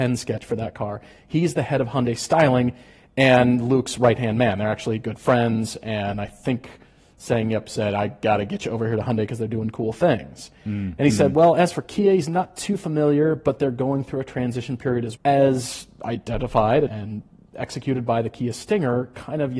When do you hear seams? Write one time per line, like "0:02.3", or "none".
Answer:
0:15.1
0:16.9